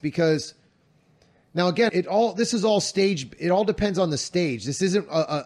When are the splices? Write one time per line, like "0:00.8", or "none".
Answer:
0:01.9